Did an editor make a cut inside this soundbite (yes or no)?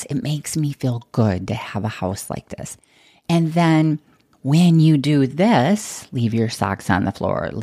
no